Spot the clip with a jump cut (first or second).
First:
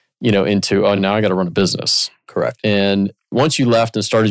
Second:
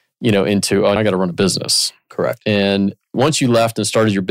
second